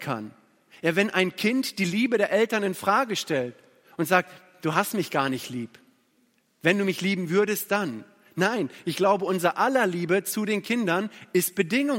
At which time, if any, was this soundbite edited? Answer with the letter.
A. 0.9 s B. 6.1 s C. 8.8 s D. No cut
D